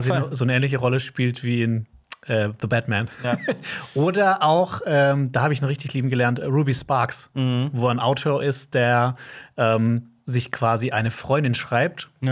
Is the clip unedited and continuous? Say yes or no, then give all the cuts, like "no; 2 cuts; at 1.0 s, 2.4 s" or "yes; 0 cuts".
yes; 0 cuts